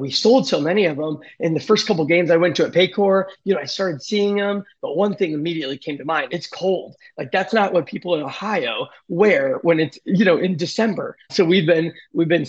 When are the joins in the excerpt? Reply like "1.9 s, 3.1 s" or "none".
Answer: 6.3 s, 11.3 s